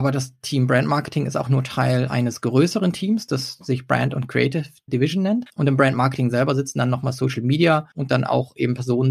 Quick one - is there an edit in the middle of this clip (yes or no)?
yes